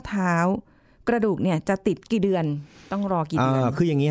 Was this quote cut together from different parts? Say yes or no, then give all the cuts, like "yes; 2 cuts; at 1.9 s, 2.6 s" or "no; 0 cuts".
yes; 1 cut; at 2.0 s